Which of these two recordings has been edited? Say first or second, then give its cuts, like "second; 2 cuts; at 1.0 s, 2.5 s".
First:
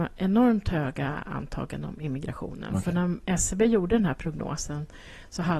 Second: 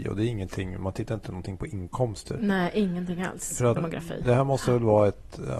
second; 1 cut; at 3.8 s